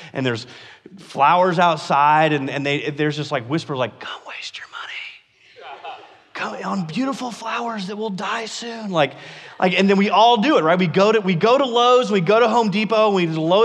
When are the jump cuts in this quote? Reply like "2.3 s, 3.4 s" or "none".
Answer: none